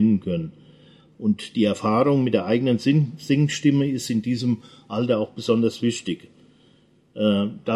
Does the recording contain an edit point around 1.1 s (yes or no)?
yes